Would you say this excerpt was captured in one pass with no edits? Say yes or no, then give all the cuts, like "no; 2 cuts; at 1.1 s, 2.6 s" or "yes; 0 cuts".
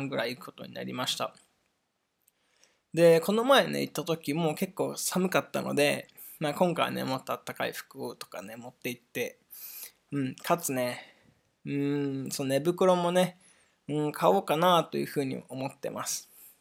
yes; 0 cuts